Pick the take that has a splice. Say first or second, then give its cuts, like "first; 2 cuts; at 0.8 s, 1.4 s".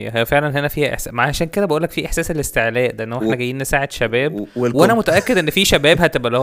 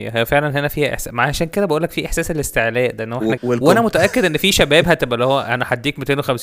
second; 1 cut; at 3.4 s